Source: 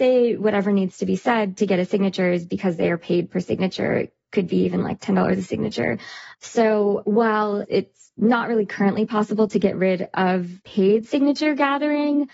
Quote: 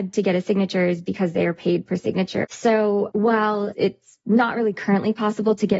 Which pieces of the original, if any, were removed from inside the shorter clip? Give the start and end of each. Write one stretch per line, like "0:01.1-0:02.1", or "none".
0:03.9-0:06.4